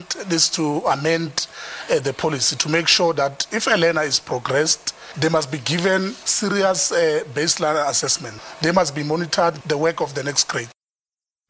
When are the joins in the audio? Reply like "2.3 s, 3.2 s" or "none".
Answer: 9.6 s